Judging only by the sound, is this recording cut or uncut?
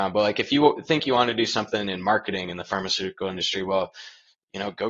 uncut